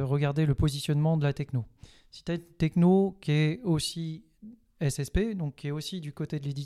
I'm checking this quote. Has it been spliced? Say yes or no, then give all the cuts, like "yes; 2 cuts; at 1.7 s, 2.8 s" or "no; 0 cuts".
no; 0 cuts